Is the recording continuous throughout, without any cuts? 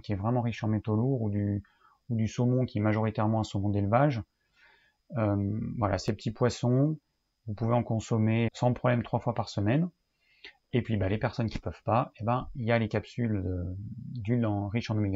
no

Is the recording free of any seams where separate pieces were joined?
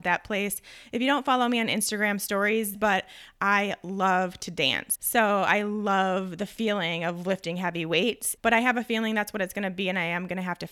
no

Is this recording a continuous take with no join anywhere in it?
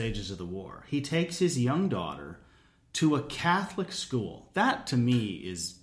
yes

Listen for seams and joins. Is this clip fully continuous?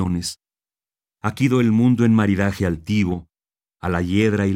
yes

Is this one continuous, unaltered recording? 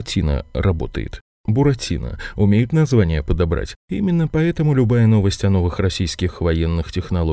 no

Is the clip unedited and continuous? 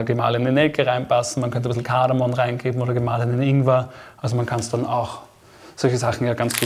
yes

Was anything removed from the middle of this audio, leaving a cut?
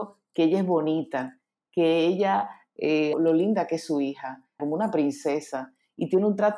yes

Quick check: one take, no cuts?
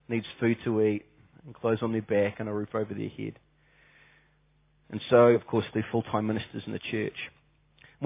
yes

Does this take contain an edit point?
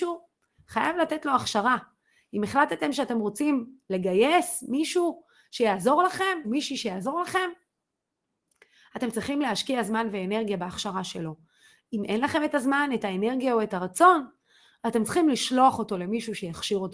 yes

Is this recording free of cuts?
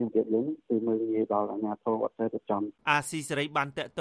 no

